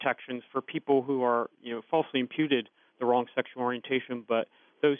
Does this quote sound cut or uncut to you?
uncut